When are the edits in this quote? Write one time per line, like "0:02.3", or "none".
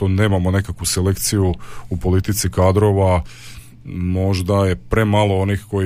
none